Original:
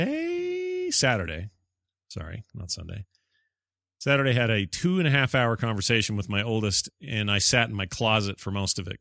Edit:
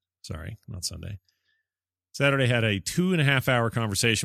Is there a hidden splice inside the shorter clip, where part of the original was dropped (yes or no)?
no